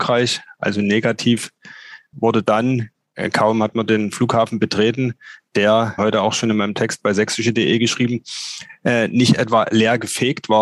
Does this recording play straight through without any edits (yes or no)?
no